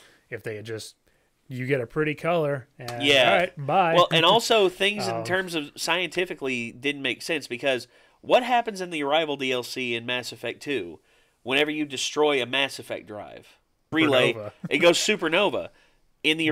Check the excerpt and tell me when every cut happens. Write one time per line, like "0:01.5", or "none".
0:13.9